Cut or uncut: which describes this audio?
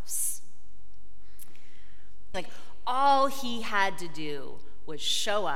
cut